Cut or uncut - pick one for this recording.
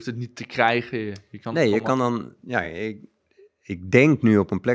uncut